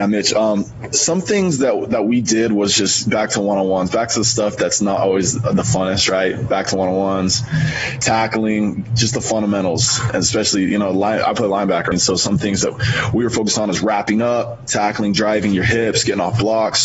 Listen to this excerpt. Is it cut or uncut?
cut